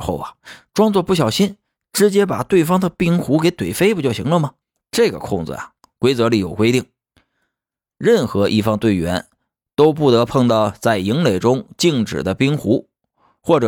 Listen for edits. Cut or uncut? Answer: uncut